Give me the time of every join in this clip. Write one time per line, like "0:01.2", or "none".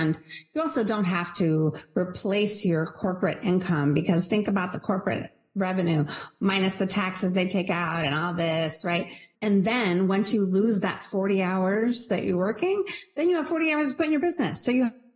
0:09.3